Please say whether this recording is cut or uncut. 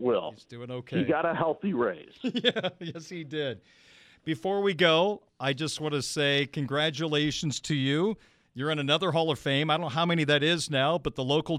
uncut